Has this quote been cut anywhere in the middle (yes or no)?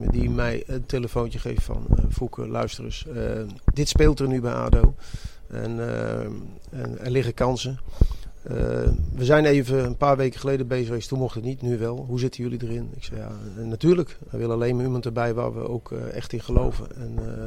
yes